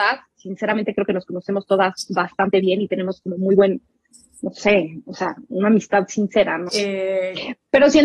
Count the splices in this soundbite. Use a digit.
1